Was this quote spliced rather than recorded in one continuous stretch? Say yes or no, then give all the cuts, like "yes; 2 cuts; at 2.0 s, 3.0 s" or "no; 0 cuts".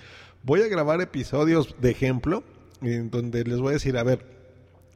no; 0 cuts